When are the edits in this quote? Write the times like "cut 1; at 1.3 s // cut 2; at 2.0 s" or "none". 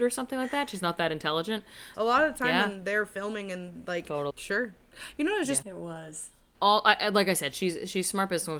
cut 1; at 1.9 s // cut 2; at 4.3 s // cut 3; at 5.6 s